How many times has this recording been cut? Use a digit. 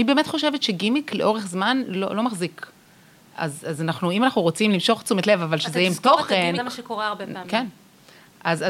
1